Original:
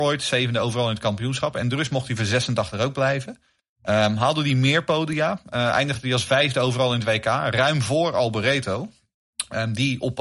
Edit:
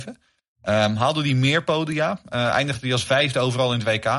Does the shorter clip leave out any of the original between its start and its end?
no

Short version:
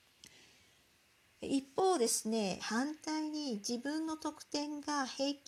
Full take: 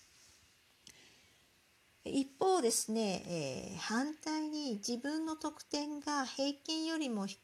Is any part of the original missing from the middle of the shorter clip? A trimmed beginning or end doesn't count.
yes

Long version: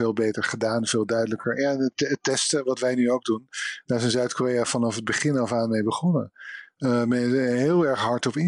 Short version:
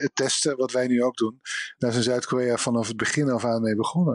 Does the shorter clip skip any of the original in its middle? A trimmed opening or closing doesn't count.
no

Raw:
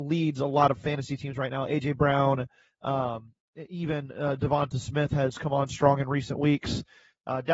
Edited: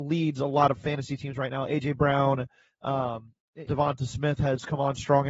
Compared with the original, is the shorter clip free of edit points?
no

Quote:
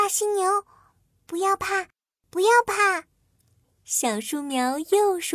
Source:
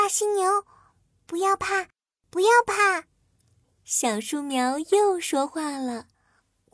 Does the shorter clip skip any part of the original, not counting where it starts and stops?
no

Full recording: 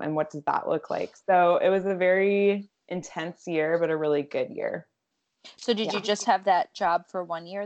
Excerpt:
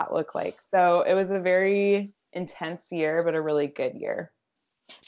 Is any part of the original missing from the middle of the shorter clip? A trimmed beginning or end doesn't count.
no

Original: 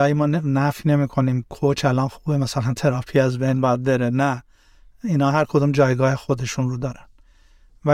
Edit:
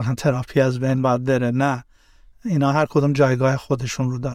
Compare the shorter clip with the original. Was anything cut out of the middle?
no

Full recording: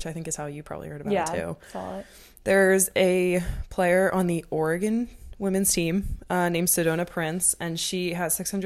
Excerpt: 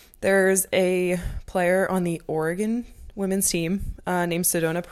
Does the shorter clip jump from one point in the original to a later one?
no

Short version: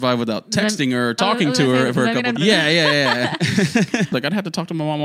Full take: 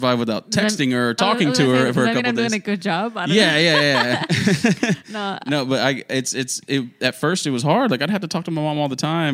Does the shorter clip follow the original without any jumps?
no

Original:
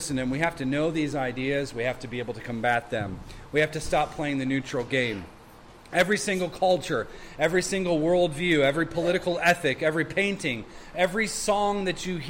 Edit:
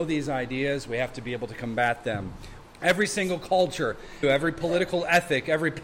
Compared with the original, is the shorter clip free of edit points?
no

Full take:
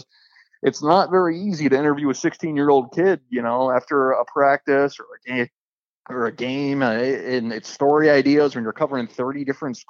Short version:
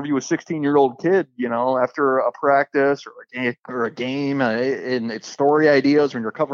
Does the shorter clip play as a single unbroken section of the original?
no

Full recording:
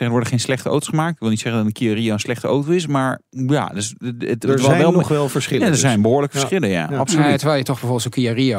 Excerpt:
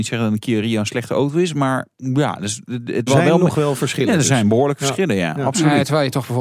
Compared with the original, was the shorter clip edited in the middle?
yes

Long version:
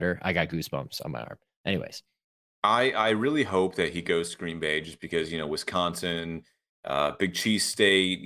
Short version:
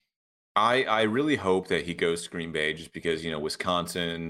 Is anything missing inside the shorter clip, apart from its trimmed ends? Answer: no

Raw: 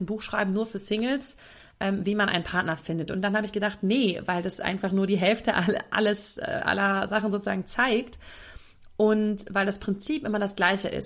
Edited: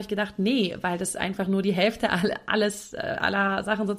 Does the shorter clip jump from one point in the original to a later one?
no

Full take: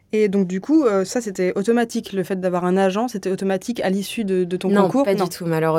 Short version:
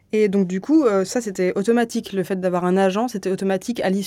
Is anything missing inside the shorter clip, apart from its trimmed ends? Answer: no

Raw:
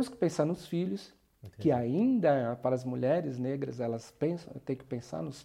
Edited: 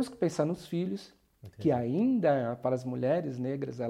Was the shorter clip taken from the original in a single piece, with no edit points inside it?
yes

